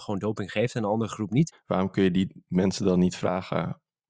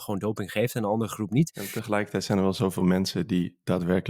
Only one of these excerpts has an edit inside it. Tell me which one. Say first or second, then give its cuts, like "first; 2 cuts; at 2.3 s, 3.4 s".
first; 1 cut; at 1.5 s